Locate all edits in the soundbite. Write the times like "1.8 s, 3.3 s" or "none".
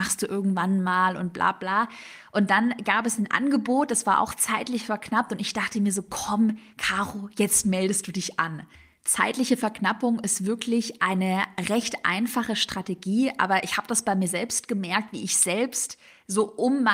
none

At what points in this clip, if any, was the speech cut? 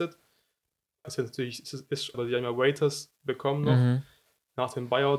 1.0 s, 2.1 s

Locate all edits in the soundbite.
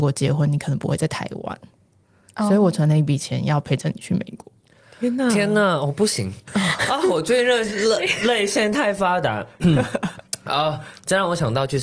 6.5 s

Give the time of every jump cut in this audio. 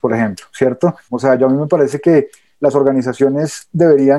1.1 s

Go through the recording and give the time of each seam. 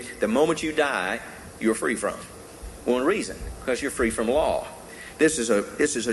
none

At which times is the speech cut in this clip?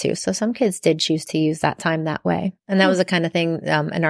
2.6 s

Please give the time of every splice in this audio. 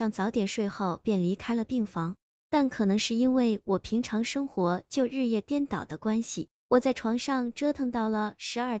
none

